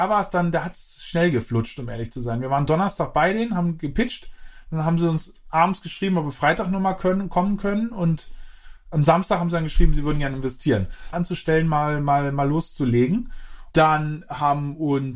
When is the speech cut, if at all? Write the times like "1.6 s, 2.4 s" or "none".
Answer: 11.1 s, 13.7 s